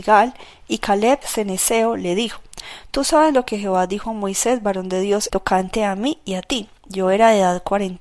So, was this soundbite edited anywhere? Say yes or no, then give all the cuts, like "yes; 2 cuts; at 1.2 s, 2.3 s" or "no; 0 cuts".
yes; 2 cuts; at 1.2 s, 5.3 s